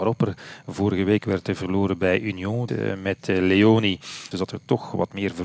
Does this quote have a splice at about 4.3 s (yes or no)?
yes